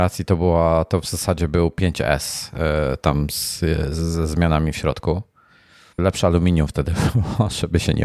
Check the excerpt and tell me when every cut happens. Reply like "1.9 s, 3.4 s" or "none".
6.0 s